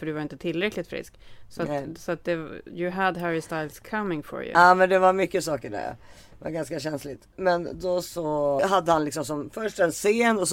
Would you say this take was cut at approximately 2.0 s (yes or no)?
no